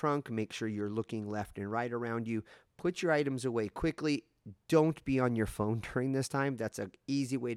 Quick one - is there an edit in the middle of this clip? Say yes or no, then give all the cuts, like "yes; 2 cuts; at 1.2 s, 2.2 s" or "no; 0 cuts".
no; 0 cuts